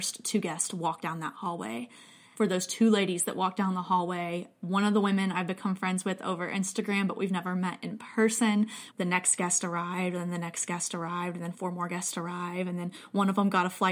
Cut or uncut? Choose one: cut